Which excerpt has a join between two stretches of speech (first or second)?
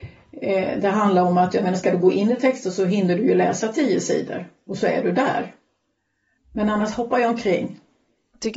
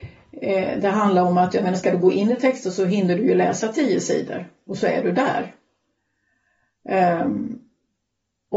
first